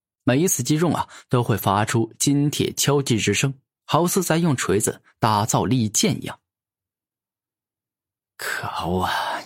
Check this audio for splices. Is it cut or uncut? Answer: uncut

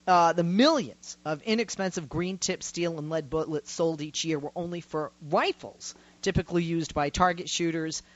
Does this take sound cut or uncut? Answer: uncut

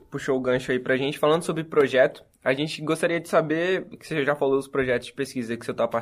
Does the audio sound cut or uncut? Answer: uncut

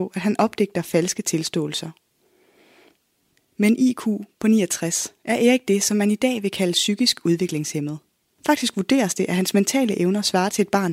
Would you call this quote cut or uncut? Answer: cut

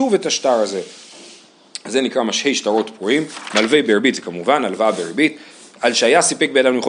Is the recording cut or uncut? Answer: uncut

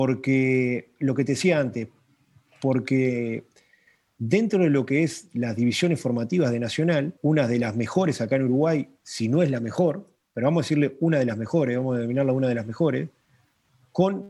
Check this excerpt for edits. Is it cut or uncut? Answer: cut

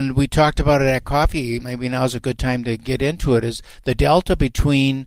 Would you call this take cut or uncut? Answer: uncut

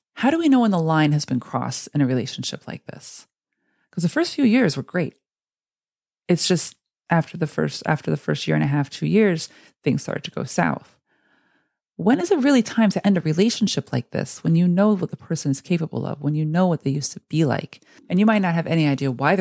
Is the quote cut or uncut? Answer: cut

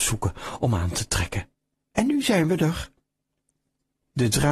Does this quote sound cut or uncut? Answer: uncut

